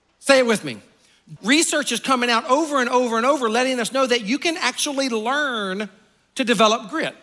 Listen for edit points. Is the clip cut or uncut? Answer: cut